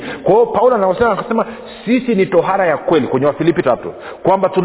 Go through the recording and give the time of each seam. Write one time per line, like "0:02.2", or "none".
0:03.6